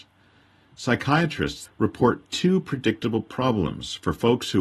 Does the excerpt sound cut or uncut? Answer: cut